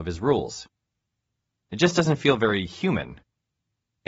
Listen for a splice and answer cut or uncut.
cut